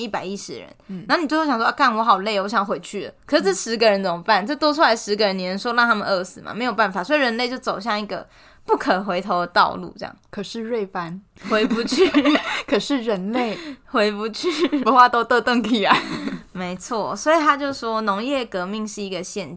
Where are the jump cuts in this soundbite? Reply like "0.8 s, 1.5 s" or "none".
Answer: none